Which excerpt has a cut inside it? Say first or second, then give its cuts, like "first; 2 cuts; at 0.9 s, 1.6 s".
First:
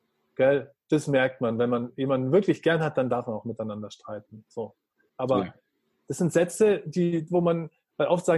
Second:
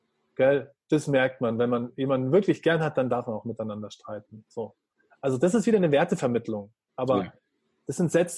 first; 2 cuts; at 5.1 s, 7.3 s